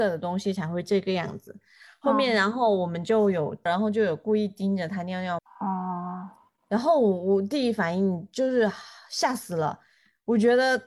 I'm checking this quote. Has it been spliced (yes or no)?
yes